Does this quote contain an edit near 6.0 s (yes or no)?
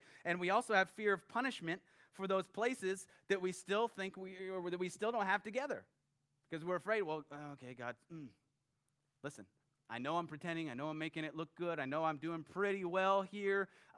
no